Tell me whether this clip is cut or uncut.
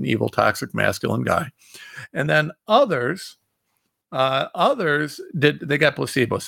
uncut